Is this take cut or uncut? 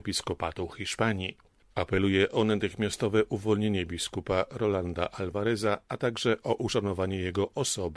uncut